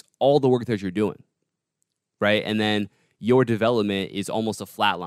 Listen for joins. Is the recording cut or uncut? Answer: uncut